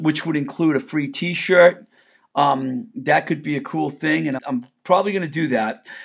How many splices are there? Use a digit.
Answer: 1